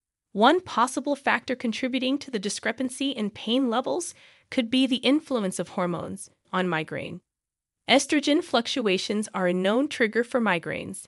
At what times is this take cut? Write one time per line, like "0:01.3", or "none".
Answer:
0:06.4